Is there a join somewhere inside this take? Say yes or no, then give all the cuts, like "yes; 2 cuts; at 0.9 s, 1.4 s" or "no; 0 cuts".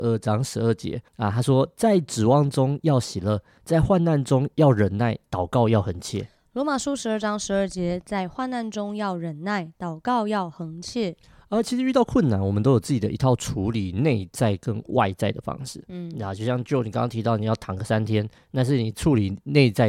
yes; 2 cuts; at 1.1 s, 8.0 s